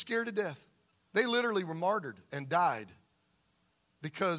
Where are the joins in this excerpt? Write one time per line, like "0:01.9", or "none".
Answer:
0:01.1